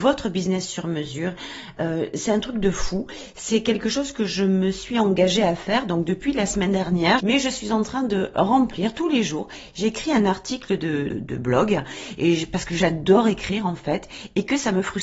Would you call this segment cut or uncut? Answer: cut